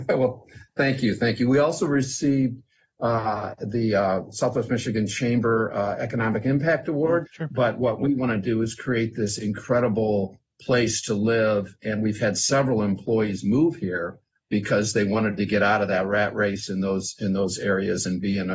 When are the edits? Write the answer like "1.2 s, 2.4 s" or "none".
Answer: 7.3 s